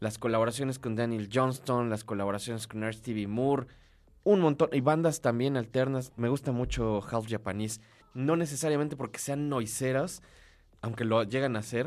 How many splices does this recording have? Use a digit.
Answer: 2